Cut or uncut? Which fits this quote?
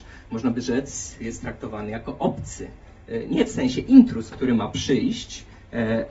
cut